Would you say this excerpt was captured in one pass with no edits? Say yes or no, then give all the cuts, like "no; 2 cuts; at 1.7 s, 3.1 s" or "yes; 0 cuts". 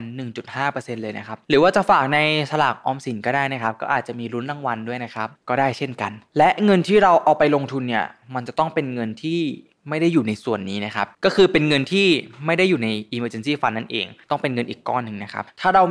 no; 1 cut; at 11.1 s